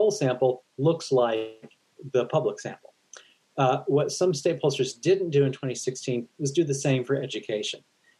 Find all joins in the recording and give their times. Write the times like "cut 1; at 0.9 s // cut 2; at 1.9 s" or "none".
none